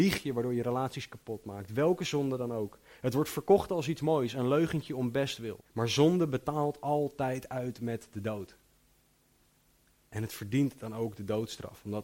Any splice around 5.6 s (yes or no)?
yes